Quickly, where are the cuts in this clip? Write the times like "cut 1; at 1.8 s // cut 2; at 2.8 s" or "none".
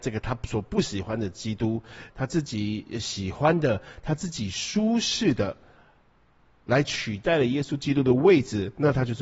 cut 1; at 2.1 s